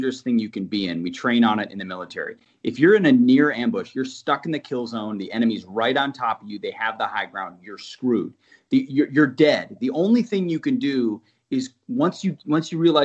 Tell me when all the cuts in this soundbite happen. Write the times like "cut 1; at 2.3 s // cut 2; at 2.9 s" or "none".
none